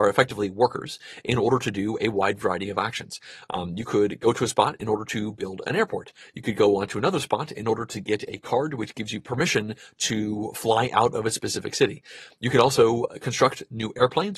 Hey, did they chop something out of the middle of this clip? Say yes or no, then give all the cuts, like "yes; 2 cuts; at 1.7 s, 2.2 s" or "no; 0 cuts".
no; 0 cuts